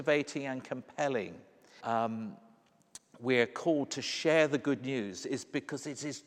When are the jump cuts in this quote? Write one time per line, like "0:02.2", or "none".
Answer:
0:01.8